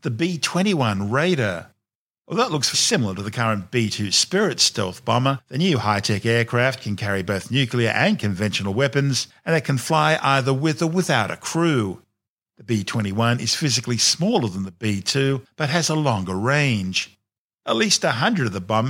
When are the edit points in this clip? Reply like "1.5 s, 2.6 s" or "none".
2.7 s